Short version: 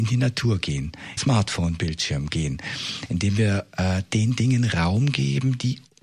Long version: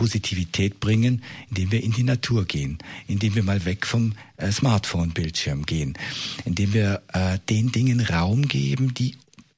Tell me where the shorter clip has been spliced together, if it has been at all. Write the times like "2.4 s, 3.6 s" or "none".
1.2 s